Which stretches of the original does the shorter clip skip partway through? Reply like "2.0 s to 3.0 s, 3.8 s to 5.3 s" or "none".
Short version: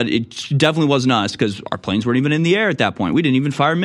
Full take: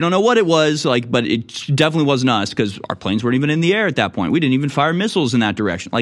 none